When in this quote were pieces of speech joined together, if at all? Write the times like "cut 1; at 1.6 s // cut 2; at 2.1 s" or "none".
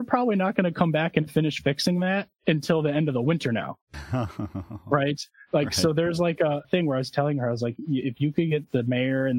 cut 1; at 6.6 s